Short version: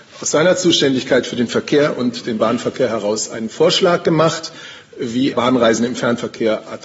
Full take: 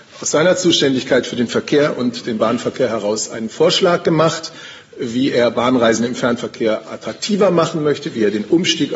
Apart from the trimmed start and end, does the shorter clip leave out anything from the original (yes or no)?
yes